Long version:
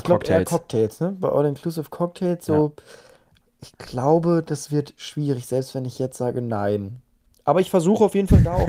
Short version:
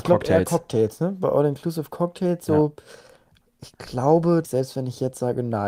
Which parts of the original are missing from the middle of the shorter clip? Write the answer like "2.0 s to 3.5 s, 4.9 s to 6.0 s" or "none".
4.4 s to 5.4 s